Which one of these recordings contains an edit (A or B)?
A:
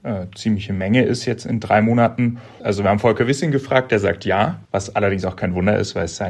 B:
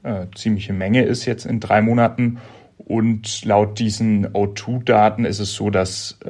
A